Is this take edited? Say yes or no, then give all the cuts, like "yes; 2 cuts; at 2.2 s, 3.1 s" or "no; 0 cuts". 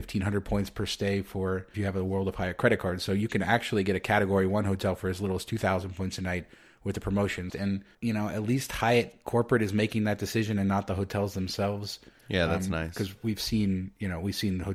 yes; 1 cut; at 7.5 s